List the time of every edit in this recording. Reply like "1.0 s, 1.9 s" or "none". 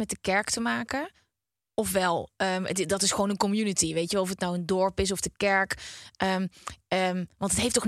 none